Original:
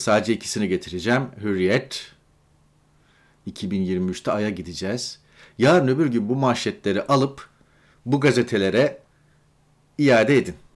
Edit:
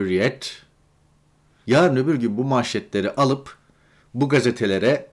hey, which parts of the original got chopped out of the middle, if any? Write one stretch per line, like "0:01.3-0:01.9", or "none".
0:03.1-0:05.5